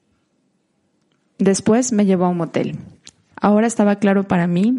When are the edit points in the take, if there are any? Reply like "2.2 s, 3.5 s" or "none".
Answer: 3.3 s